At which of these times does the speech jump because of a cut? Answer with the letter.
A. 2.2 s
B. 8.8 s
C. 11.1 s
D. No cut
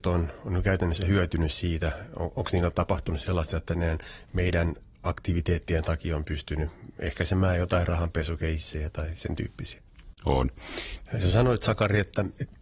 C